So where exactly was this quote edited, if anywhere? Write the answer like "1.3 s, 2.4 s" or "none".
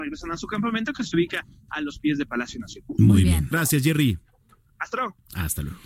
3.5 s